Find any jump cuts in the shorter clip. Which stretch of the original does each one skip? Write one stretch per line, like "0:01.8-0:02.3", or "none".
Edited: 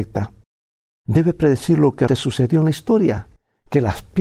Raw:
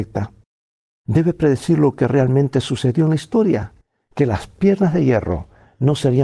0:02.1-0:02.5